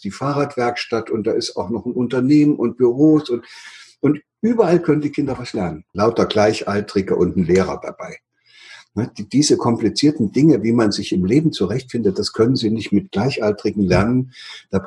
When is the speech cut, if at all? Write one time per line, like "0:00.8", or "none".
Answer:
0:05.9

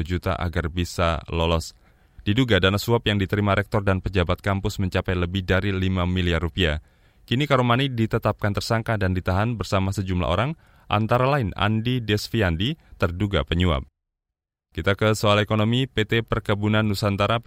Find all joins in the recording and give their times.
none

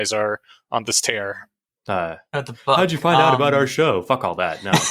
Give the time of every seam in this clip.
0:01.8

